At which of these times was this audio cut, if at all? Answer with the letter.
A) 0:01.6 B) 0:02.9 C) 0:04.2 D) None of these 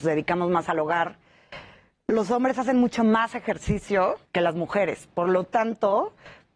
C